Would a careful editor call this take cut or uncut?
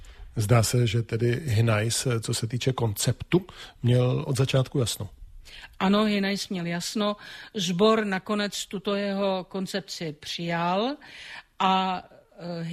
uncut